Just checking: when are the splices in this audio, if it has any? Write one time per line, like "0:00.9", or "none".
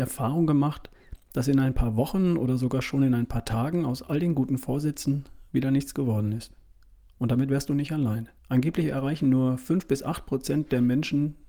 0:08.4